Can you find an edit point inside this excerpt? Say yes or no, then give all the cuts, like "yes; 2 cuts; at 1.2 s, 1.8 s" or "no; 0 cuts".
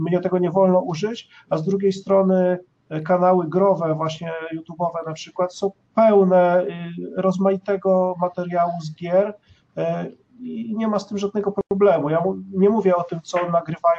no; 0 cuts